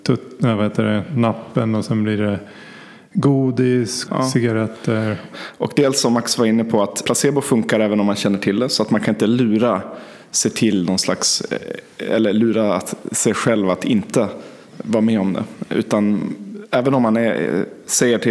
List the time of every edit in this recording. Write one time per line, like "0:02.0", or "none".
0:04.1
0:05.3
0:07.0